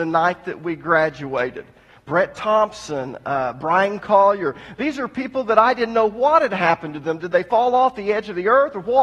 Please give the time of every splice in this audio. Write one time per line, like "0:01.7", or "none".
none